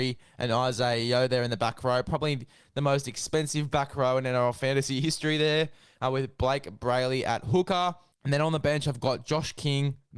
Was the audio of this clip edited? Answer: no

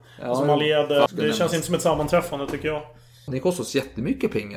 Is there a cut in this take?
yes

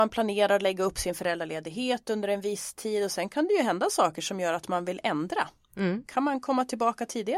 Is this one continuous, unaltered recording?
yes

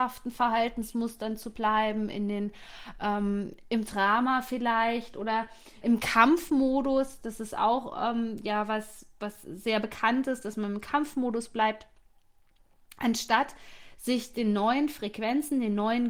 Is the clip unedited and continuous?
no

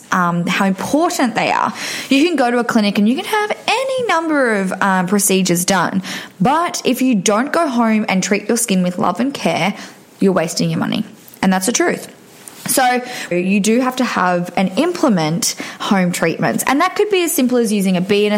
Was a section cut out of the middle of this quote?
yes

